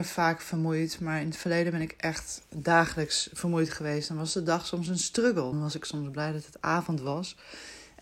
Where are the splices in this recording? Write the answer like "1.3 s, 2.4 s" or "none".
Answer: 5.5 s